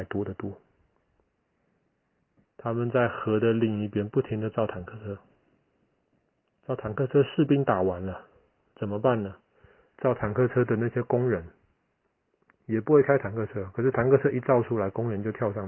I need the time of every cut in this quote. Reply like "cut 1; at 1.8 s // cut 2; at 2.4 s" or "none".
cut 1; at 2.5 s